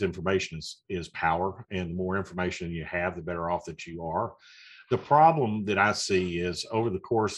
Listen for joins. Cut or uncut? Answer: uncut